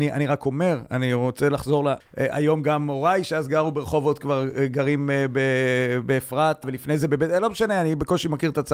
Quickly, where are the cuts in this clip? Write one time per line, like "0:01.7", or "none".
0:02.0
0:06.6